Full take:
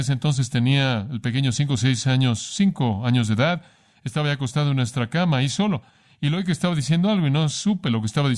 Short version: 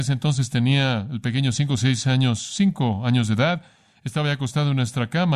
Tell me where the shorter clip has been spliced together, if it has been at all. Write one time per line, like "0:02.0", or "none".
none